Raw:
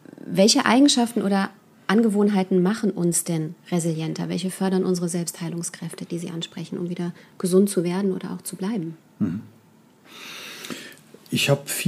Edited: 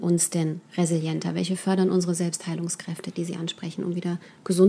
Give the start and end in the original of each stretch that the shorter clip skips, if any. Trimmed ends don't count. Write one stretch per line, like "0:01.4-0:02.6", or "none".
none

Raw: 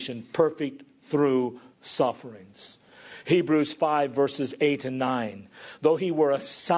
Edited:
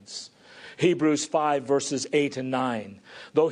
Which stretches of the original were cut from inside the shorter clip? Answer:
none

